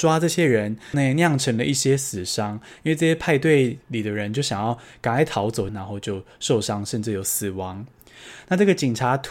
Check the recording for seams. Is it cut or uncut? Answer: cut